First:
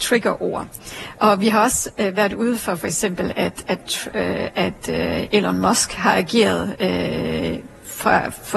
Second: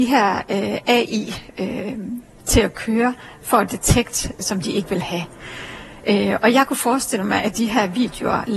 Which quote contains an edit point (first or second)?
second